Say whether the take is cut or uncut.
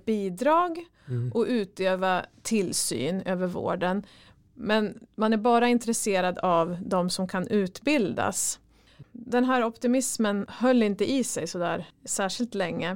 cut